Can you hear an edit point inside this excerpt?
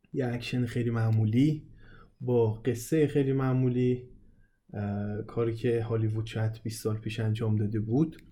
no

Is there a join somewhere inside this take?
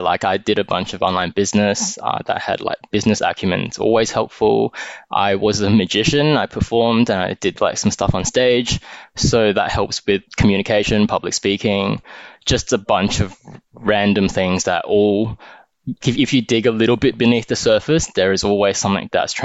yes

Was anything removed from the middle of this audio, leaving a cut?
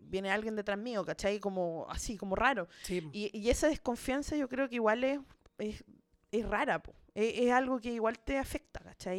no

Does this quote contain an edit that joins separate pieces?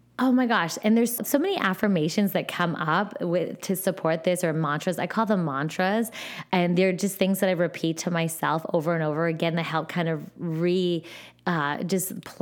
yes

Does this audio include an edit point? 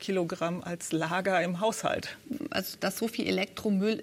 no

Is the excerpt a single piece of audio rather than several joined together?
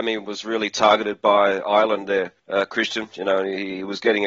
no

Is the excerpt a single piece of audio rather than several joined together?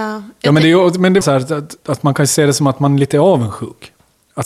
no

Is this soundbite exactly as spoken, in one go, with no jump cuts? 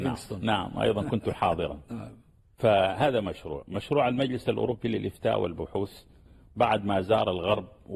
yes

